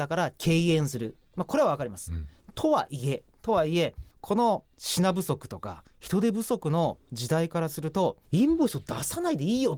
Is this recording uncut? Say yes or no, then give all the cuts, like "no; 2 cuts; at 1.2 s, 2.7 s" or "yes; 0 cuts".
yes; 0 cuts